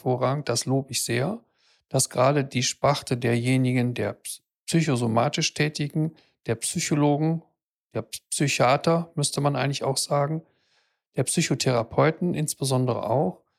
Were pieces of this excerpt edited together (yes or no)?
no